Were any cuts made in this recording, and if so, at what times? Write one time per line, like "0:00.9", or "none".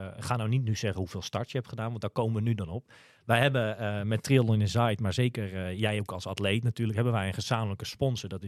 none